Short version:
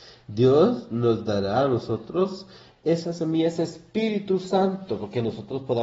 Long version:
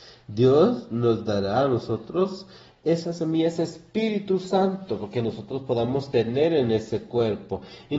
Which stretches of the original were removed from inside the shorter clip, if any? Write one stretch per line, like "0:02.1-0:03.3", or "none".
none